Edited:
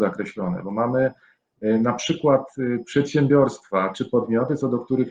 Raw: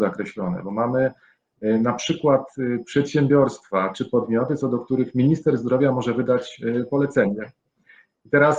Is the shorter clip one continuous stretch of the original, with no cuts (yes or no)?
yes